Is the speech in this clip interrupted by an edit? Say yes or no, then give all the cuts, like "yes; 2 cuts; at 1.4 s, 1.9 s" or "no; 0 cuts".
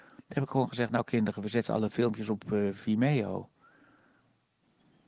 no; 0 cuts